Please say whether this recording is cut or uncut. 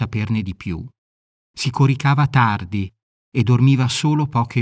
cut